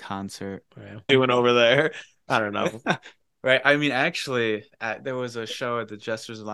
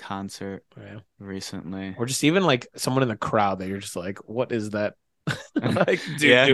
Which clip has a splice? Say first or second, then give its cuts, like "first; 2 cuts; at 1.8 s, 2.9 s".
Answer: first; 1 cut; at 1.1 s